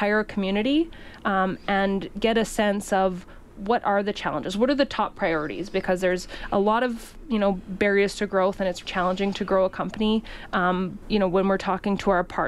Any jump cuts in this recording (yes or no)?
yes